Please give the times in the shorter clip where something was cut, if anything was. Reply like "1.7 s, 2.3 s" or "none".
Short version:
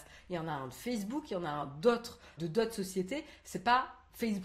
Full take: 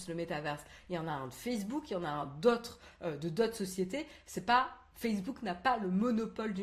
2.4 s